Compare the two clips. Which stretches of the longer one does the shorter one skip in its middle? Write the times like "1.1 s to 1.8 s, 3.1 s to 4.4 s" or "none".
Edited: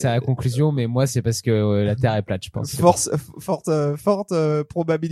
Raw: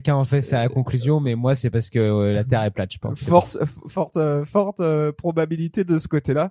none